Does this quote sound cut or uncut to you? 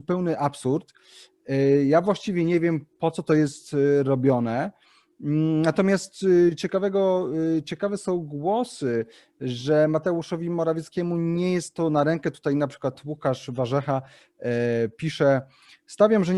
uncut